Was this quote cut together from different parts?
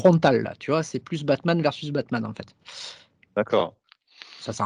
no; 0 cuts

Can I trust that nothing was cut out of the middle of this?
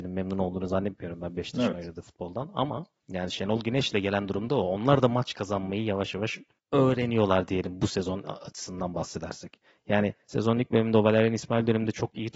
yes; 0 cuts

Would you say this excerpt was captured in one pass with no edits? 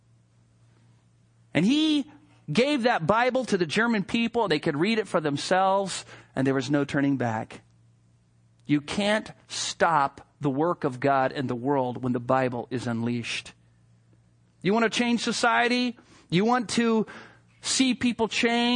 yes; 0 cuts

